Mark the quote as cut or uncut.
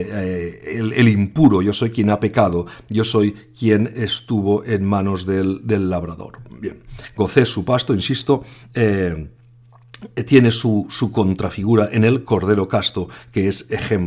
uncut